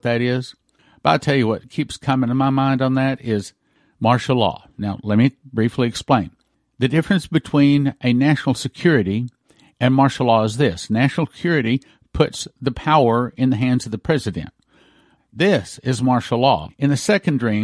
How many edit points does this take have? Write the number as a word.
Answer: two